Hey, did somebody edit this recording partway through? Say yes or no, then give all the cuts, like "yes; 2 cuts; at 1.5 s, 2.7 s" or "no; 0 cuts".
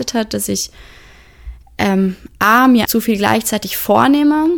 yes; 1 cut; at 2.9 s